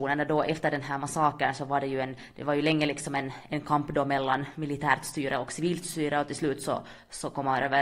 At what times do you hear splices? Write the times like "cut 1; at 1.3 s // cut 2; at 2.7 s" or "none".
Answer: none